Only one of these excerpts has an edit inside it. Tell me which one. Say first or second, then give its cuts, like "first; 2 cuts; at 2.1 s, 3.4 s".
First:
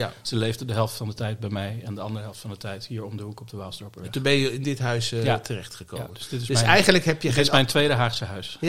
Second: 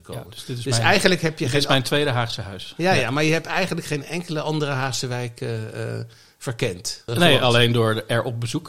second; 1 cut; at 7.1 s